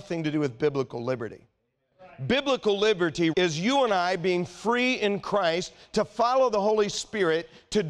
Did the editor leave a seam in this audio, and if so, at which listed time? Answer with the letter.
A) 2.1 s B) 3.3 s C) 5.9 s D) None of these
B